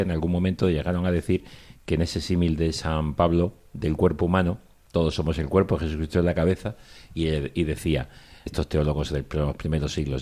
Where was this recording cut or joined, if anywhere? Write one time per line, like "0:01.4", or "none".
0:08.5